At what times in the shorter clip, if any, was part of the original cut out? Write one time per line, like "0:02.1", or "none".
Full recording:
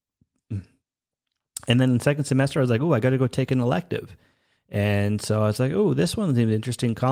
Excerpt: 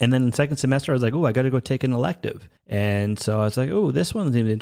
0:02.6

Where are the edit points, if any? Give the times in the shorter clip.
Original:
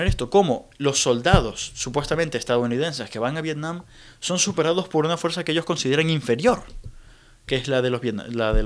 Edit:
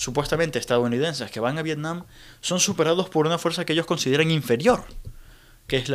none

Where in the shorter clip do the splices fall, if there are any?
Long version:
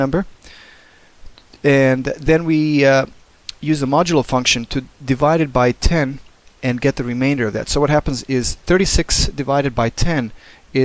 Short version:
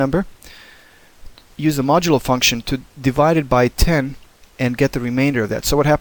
0:01.5

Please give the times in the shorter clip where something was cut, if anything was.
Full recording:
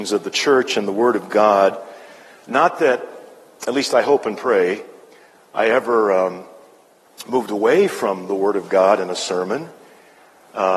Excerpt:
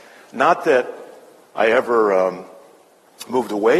0:01.4

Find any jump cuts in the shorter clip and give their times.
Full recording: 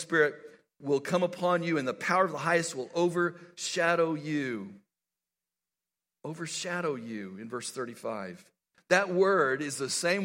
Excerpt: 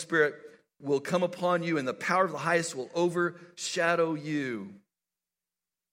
none

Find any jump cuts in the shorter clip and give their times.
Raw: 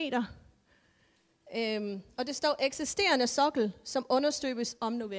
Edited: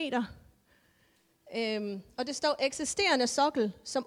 none

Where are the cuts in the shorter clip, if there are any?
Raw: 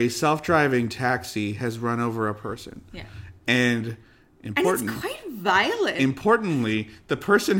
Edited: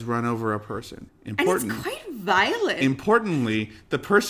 0:01.1

